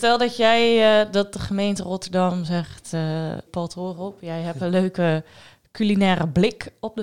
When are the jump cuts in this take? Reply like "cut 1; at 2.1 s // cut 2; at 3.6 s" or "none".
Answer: cut 1; at 3.5 s